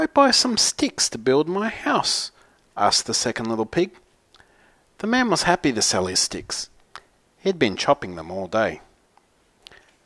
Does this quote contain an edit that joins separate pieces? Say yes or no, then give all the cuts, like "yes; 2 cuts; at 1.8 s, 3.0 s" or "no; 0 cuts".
no; 0 cuts